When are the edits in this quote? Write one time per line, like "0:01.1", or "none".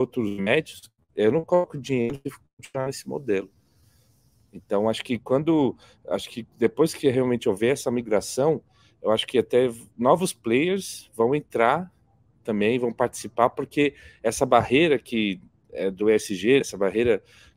0:16.6

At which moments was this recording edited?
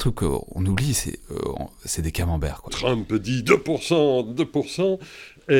0:02.7

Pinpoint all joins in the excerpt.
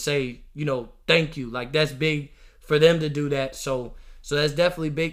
none

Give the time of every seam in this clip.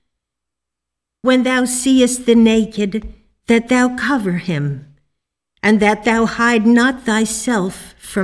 none

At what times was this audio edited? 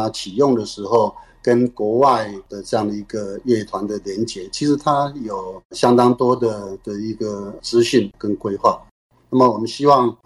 none

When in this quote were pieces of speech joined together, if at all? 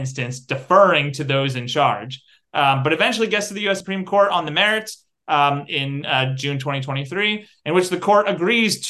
none

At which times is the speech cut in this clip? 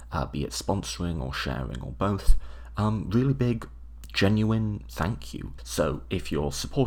0:05.6

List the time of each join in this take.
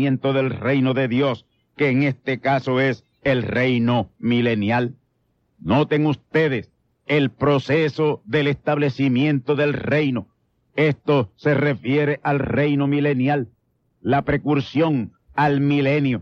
none

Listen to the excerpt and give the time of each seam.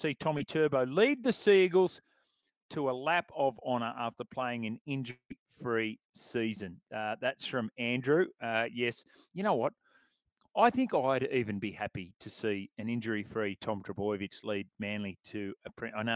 none

